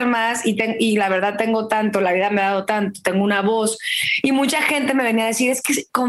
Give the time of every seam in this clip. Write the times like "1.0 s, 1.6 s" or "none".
none